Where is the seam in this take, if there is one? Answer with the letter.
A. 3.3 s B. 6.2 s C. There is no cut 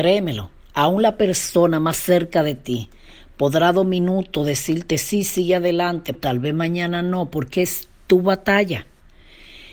B